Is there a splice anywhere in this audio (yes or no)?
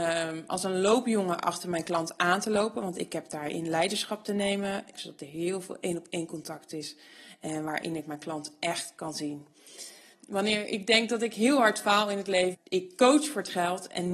yes